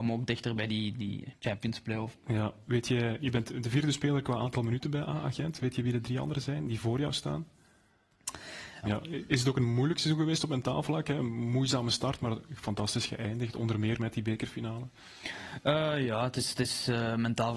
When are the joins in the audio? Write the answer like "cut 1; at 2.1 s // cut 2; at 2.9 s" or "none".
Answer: cut 1; at 2.2 s // cut 2; at 8.8 s